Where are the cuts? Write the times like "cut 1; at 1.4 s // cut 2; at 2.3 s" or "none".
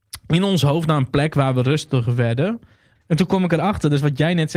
cut 1; at 2.9 s

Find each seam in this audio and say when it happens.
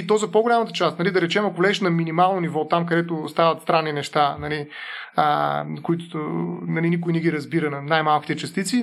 none

